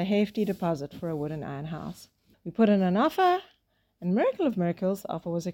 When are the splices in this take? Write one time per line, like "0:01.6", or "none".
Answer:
0:02.3